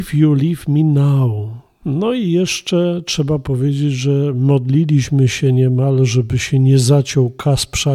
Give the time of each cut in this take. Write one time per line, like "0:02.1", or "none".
0:01.8

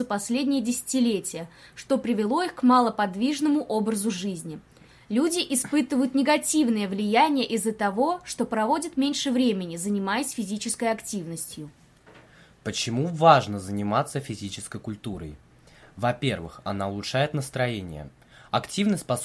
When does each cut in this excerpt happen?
none

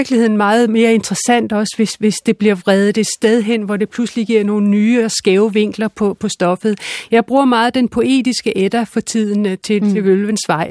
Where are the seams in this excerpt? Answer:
none

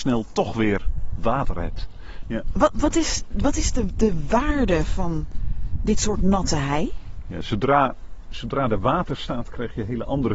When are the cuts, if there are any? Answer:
0:02.2

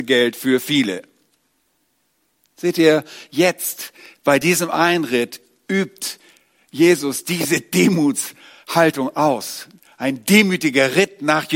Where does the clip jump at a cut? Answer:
none

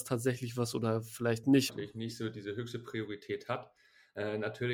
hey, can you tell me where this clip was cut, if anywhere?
0:01.7

